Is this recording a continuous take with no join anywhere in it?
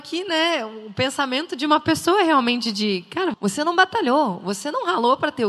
no; 1 cut; at 3.3 s

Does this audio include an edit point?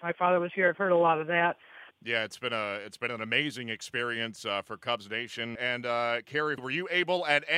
yes; 3 cuts; at 1.9 s, 5.6 s, 6.6 s

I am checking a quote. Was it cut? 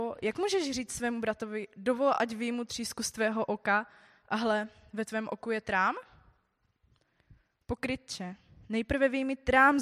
no; 0 cuts

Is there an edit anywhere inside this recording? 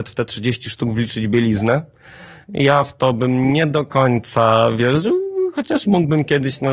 no; 0 cuts

